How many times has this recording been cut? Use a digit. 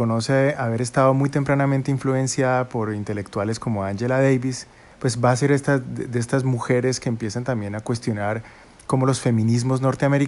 1